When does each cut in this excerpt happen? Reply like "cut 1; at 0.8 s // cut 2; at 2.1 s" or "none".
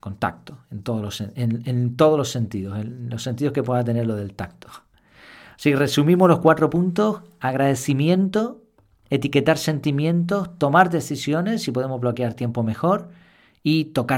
none

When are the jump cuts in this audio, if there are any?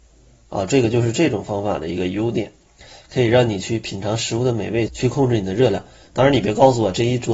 cut 1; at 4.9 s

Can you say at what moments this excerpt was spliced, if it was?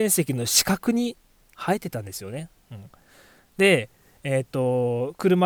cut 1; at 2.6 s

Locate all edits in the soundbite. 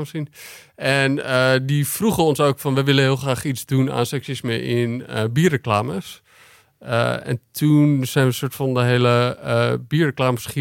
none

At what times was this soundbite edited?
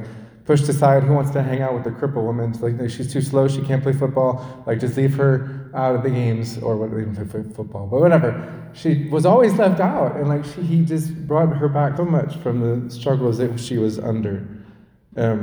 cut 1; at 12.0 s

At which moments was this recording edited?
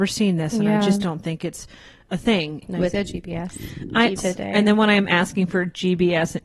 cut 1; at 2.6 s // cut 2; at 4.2 s

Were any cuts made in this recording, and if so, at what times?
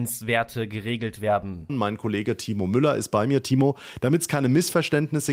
cut 1; at 1.7 s

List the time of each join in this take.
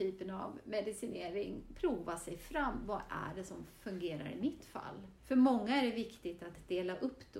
cut 1; at 5.2 s

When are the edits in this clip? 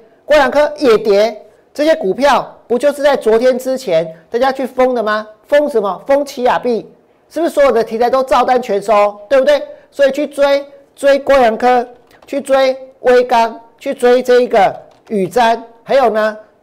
none

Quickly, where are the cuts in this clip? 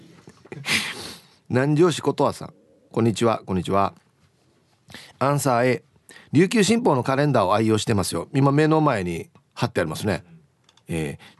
none

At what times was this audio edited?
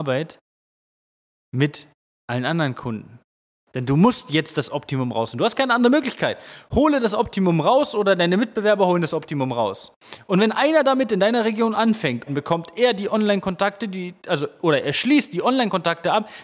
cut 1; at 12.3 s

